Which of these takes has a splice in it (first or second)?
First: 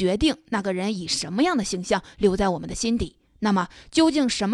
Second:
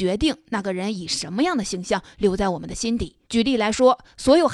second